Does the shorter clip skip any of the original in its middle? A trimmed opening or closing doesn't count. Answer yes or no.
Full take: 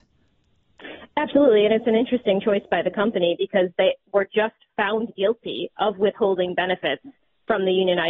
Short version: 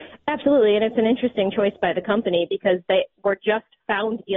no